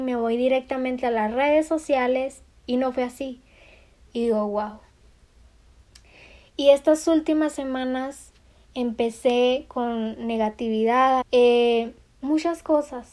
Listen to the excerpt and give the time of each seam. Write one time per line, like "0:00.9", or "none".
0:04.0
0:11.2